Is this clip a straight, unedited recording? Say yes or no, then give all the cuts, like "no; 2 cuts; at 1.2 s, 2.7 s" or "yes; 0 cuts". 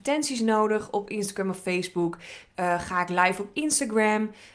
no; 1 cut; at 2.5 s